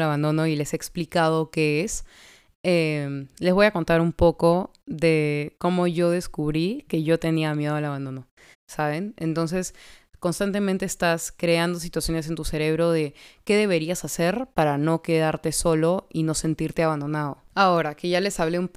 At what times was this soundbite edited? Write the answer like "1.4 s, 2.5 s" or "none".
8.5 s